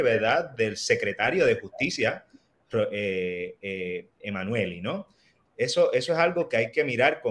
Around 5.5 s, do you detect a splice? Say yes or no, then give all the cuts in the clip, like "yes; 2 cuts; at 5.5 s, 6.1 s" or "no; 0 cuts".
yes; 1 cut; at 5.5 s